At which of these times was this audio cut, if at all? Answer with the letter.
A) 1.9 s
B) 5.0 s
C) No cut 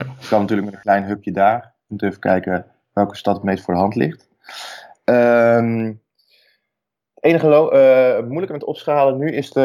A